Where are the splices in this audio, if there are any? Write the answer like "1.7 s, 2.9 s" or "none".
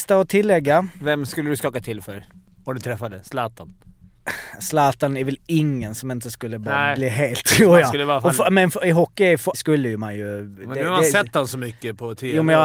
9.5 s